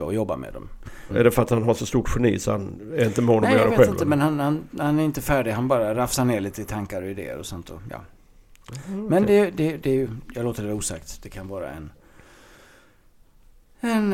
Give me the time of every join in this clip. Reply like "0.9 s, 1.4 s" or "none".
1.1 s